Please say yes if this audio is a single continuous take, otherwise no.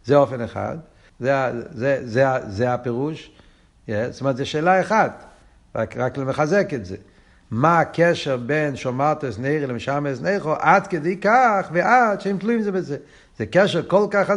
no